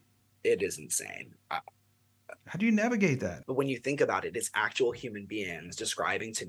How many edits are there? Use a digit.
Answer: 2